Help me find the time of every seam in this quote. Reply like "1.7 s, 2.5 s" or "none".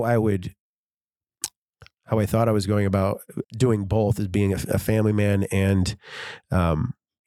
3.4 s